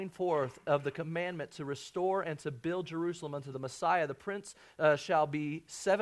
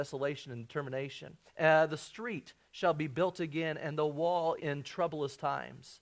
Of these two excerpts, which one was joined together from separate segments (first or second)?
second